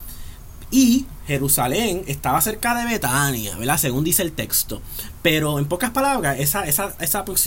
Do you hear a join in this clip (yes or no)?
no